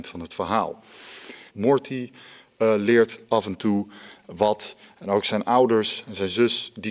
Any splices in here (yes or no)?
yes